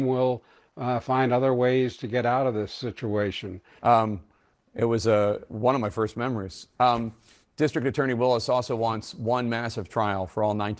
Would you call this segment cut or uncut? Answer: cut